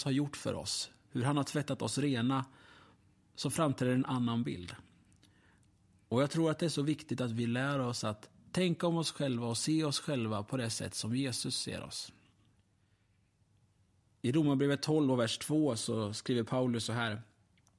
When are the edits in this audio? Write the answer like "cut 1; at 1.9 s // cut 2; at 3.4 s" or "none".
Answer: none